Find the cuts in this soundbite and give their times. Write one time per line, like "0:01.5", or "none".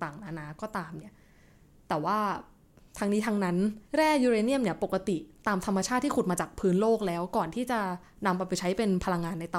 0:03.9

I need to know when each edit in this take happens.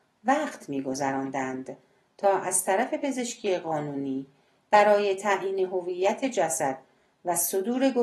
none

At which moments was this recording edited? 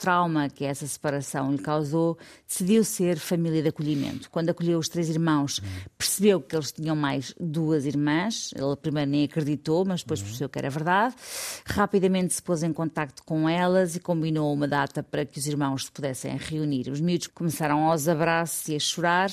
0:17.3

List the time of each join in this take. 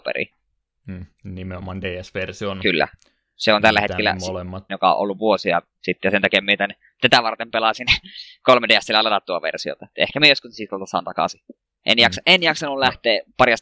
0:04.7

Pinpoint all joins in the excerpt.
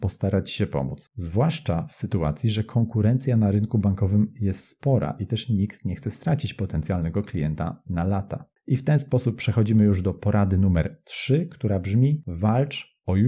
0:08.5

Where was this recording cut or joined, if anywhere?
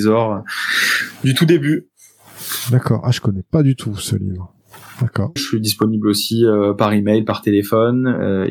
0:05.4

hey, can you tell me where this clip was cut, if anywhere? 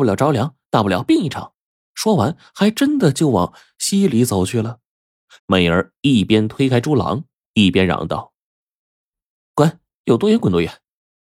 0:05.4

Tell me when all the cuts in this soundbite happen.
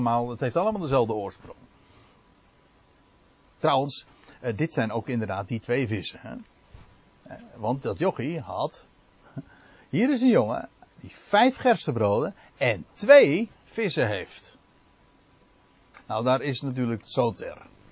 0:15.9
0:17.0

